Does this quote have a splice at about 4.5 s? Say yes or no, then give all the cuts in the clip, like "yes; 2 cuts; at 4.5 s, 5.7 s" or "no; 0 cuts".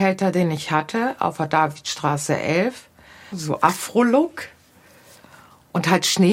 no; 1 cut; at 3.3 s